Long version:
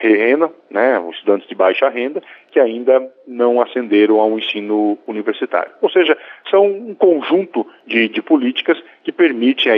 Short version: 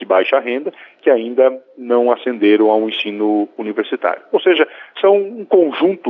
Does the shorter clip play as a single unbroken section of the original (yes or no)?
yes